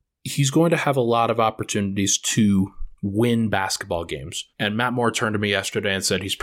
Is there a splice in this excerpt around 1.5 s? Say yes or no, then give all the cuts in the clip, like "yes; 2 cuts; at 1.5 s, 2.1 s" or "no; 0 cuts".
no; 2 cuts; at 3.0 s, 4.5 s